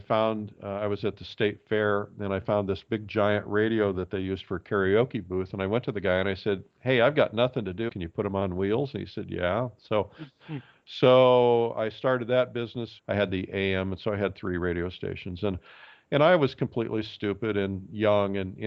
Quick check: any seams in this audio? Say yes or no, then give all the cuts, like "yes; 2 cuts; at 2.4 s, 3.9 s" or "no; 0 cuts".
yes; 2 cuts; at 7.9 s, 13.0 s